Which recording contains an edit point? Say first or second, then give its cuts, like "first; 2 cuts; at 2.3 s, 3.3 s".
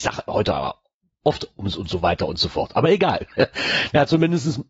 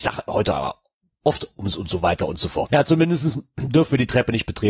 second; 1 cut; at 2.7 s